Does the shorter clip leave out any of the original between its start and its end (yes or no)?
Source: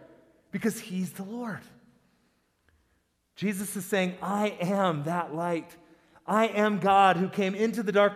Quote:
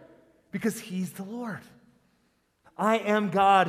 yes